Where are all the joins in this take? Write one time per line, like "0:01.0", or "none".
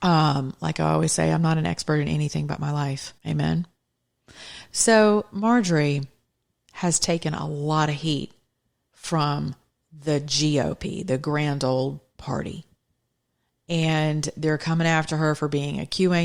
0:03.2